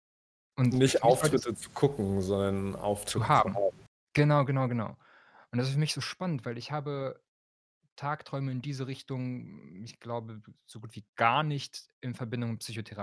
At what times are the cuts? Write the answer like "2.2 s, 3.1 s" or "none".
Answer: none